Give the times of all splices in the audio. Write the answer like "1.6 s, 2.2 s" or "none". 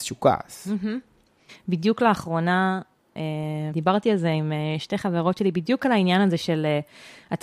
1.5 s, 3.7 s